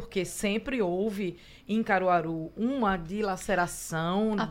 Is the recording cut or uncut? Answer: uncut